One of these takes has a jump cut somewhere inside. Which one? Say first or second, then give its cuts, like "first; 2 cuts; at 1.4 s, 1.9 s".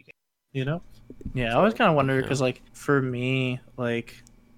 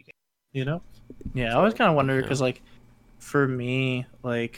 first; 1 cut; at 2.7 s